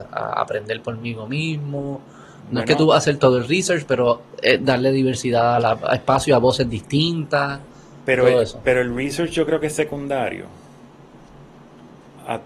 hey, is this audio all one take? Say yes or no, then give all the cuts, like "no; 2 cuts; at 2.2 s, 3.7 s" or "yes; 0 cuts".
yes; 0 cuts